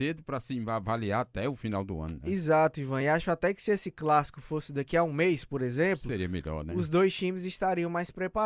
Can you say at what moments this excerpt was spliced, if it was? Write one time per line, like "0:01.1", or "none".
none

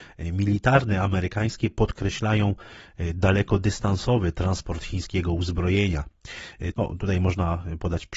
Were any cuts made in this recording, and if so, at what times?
0:06.7

